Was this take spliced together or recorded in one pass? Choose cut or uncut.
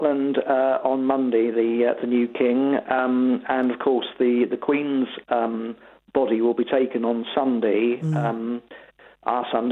uncut